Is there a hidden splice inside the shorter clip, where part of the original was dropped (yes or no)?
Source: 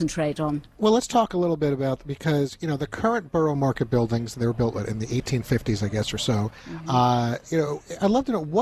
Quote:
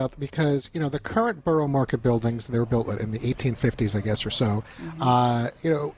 no